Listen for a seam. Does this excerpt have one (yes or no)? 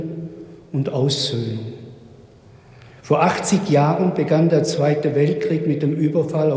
no